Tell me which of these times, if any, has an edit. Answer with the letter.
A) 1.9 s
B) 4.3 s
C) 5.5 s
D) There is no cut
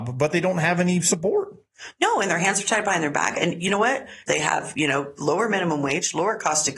B